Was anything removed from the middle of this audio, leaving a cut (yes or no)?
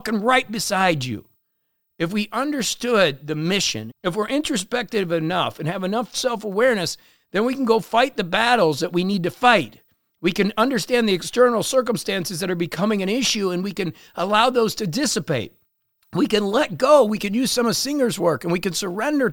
yes